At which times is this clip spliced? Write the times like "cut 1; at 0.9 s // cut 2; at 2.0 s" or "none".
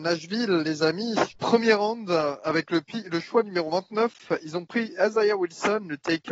cut 1; at 1.3 s